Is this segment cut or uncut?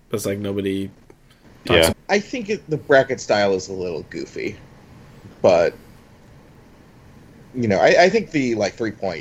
cut